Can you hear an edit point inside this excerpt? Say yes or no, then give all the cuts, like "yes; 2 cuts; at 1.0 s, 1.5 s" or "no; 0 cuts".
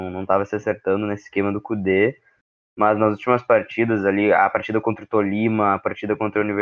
no; 0 cuts